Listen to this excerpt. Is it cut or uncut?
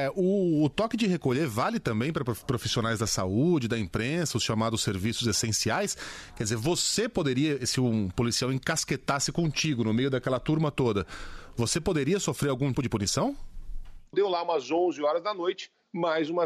cut